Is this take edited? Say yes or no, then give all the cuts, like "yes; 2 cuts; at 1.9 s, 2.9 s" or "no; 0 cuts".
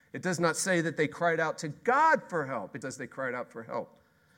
yes; 1 cut; at 2.8 s